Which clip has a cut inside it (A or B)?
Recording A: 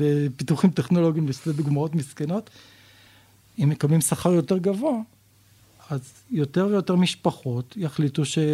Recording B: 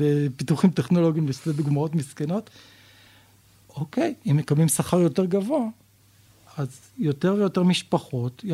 A